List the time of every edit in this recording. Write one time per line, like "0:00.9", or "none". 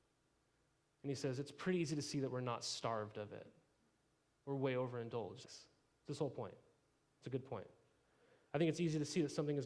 0:05.4